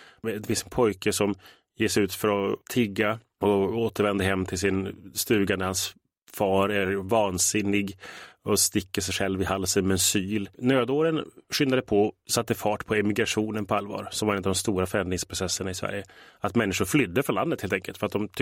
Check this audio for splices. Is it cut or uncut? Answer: cut